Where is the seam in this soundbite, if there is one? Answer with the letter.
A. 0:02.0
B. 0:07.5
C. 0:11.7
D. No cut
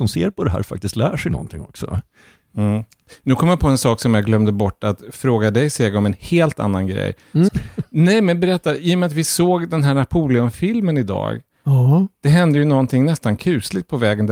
B